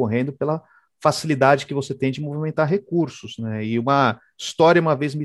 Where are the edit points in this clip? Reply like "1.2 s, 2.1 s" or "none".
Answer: none